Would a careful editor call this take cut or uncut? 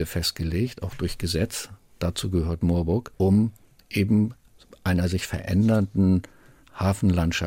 uncut